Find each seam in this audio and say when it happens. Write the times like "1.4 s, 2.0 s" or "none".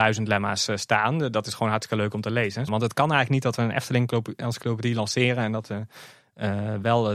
2.7 s